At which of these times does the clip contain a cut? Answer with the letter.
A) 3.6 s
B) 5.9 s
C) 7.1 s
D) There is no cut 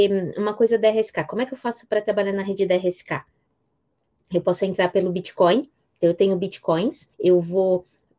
C